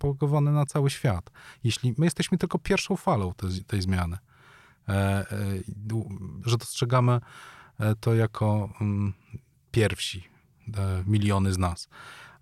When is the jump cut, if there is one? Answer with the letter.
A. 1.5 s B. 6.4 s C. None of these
B